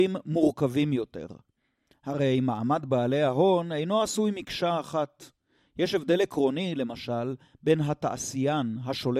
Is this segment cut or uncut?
uncut